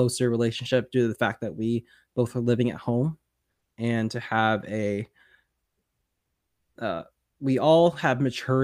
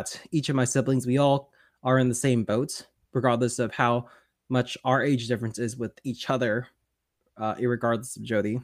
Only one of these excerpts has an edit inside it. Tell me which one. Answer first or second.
first